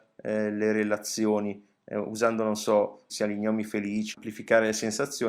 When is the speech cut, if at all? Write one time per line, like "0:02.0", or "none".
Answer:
0:03.1
0:04.1